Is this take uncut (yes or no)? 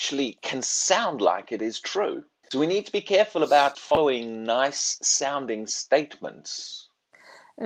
no